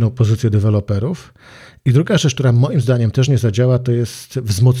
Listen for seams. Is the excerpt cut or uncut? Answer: uncut